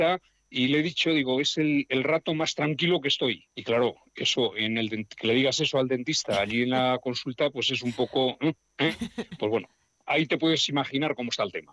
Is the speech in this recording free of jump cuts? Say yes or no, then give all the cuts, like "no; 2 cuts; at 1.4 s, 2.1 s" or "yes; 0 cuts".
no; 1 cut; at 3.5 s